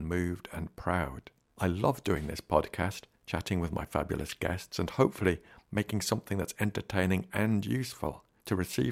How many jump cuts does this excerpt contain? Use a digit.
0